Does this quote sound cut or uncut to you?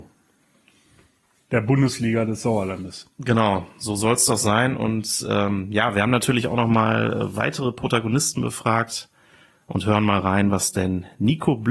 uncut